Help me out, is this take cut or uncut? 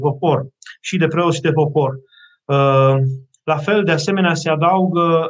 cut